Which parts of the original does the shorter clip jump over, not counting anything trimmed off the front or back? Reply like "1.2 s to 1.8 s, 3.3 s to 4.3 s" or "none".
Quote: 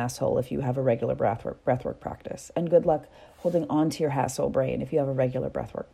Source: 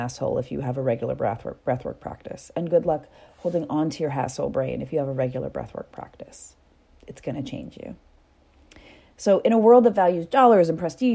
none